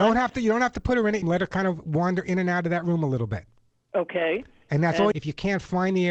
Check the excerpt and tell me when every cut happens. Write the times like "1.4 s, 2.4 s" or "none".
1.2 s, 5.1 s